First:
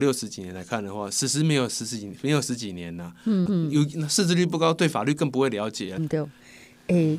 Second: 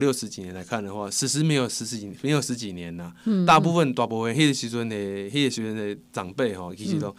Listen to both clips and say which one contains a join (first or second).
first